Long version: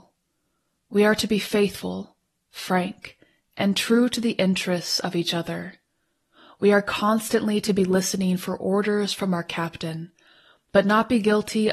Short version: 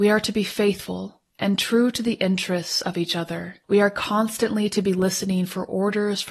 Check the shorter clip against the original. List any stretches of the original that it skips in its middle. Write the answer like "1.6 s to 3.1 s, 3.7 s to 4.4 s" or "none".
2.2 s to 3.5 s, 5.8 s to 6.5 s